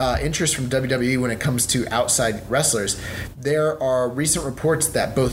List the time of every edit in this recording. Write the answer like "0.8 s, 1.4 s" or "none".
2.5 s